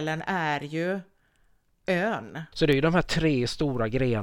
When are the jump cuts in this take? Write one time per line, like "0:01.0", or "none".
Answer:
0:02.5